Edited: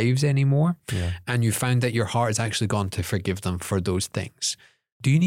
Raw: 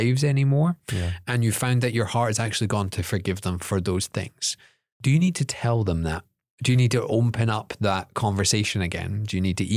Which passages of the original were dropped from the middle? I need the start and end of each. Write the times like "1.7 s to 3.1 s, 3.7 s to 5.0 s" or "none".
none